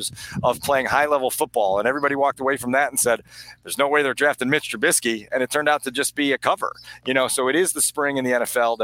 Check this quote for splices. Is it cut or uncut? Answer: uncut